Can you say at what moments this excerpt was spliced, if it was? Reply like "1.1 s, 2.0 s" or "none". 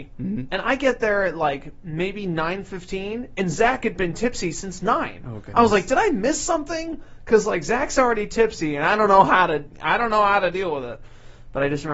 none